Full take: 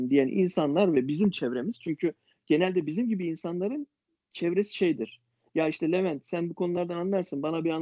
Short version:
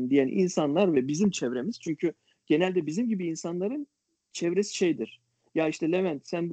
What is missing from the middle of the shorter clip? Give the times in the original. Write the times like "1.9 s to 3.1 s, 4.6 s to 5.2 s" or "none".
none